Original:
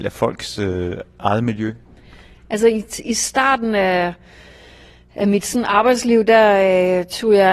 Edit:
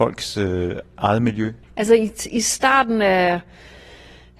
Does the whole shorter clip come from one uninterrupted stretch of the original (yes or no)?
no